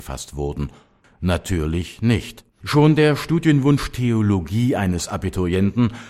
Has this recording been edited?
yes; 2 cuts; at 1.0 s, 2.5 s

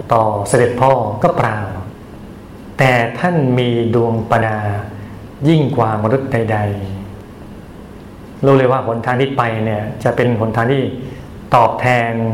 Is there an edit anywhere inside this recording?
yes; 1 cut; at 4.4 s

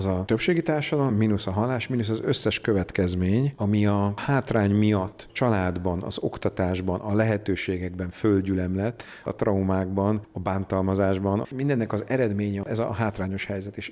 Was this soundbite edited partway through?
no; 0 cuts

